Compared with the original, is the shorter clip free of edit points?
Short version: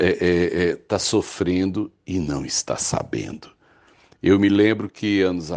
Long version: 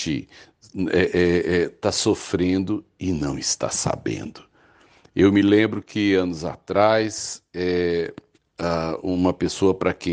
yes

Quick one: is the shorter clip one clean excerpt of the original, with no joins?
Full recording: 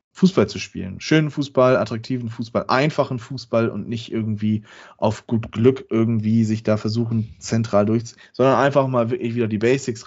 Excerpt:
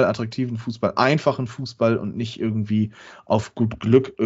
yes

